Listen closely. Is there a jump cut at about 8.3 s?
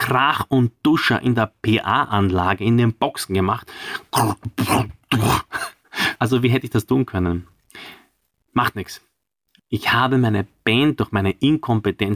no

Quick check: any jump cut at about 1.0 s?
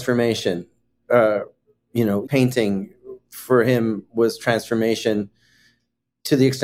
no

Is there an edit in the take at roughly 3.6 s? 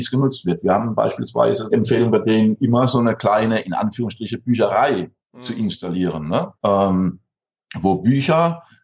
no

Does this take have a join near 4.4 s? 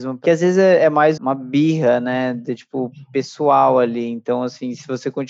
no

